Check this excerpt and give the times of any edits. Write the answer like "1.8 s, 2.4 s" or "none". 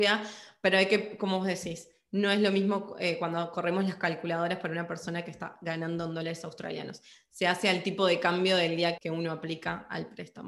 9.0 s